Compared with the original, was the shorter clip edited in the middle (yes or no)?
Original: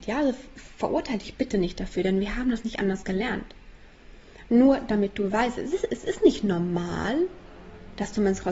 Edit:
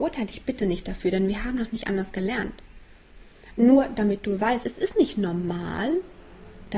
yes